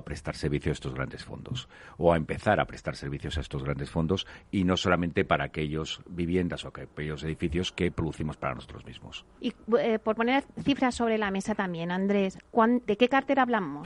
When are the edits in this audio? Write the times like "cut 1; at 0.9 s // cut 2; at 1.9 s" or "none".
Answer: cut 1; at 9.4 s // cut 2; at 12.9 s